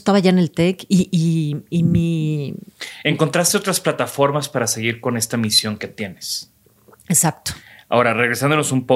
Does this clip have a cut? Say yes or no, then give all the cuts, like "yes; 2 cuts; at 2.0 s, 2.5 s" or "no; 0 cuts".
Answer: no; 0 cuts